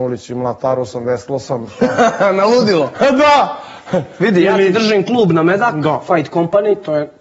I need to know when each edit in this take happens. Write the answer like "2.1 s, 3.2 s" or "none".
none